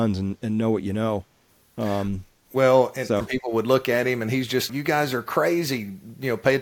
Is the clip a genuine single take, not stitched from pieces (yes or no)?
no